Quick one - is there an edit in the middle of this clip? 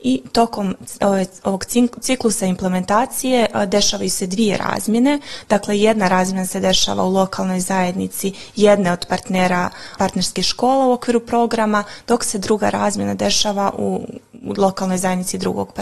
yes; 1 cut; at 10.0 s

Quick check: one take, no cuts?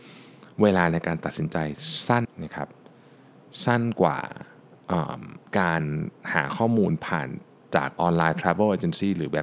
no; 2 cuts; at 2.2 s, 5.5 s

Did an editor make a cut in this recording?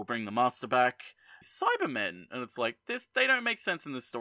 yes; 1 cut; at 1.4 s

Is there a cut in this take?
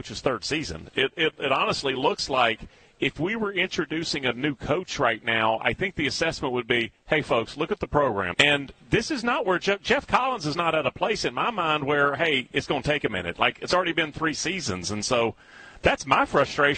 yes; 1 cut; at 8.3 s

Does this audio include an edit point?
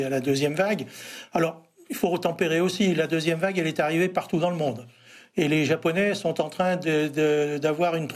no; 0 cuts

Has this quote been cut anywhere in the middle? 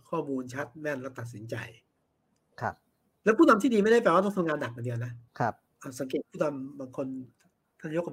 yes; 1 cut; at 5.3 s

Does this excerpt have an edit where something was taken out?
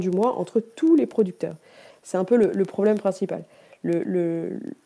yes; 1 cut; at 1.9 s

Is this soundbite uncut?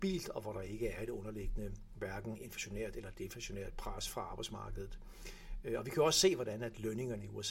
yes; 0 cuts

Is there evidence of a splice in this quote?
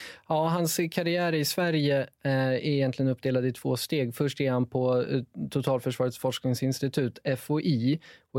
no; 0 cuts

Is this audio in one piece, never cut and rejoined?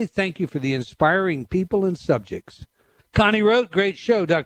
no; 1 cut; at 3.0 s

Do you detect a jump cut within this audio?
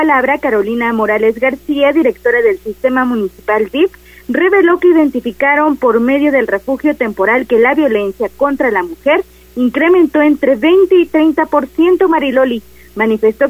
no; 0 cuts

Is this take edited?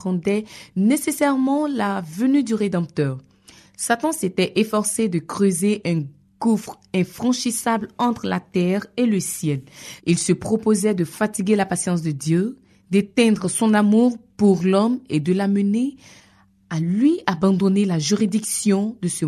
yes; 1 cut; at 10.0 s

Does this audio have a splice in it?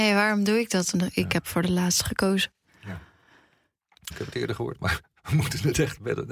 yes; 2 cuts; at 0.9 s, 4.1 s

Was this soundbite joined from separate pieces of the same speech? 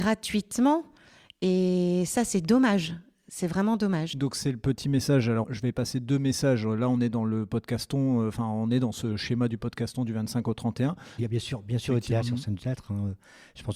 yes; 3 cuts; at 5.4 s, 11.2 s, 12.2 s

